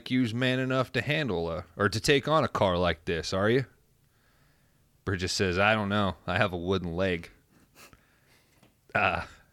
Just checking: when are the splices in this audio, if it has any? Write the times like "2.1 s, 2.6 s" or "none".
none